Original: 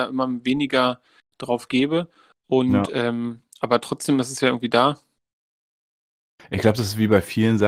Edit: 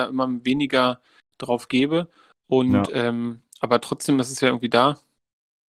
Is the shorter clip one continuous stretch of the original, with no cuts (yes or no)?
yes